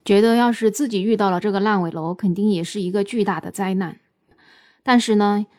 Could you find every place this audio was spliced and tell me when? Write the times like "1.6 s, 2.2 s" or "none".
none